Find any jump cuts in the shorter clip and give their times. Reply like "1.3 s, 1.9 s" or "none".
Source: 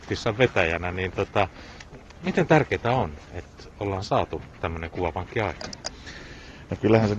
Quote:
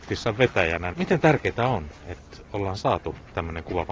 0.9 s